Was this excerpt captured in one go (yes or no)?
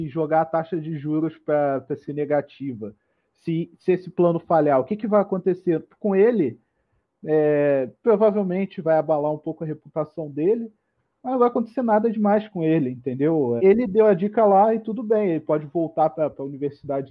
no